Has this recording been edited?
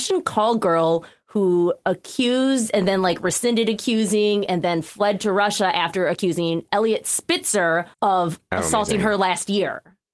yes; 1 cut; at 7.9 s

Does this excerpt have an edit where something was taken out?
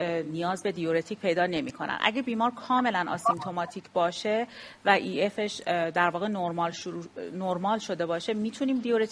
no; 0 cuts

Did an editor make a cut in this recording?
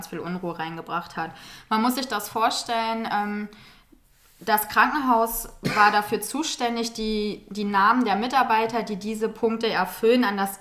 no; 0 cuts

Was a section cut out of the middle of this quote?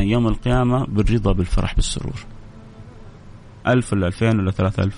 yes; 1 cut; at 3.6 s

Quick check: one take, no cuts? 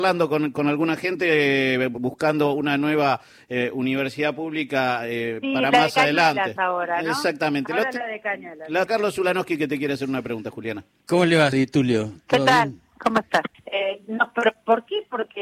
no; 3 cuts; at 8.9 s, 11.5 s, 13.5 s

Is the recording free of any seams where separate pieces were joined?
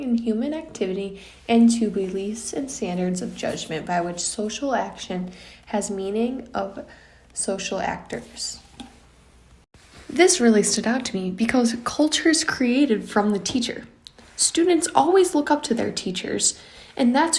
yes; 0 cuts

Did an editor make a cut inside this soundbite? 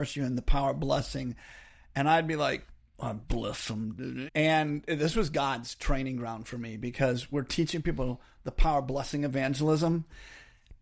yes; 1 cut; at 4.3 s

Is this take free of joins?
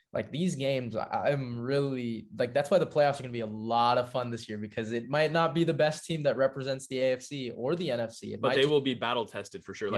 yes; 0 cuts

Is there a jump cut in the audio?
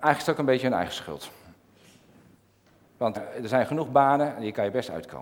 yes; 1 cut; at 3.2 s

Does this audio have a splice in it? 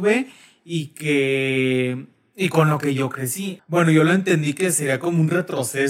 yes; 1 cut; at 3.6 s

